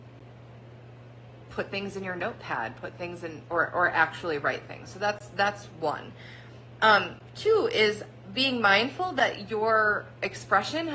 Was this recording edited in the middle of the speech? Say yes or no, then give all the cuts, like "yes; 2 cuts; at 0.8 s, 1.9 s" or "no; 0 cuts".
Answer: no; 0 cuts